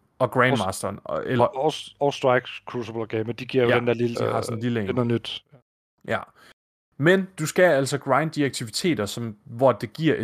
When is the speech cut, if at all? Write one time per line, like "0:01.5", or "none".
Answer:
0:01.4
0:04.1